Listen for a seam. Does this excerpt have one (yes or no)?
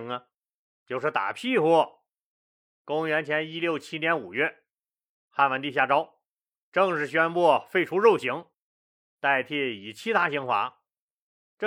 no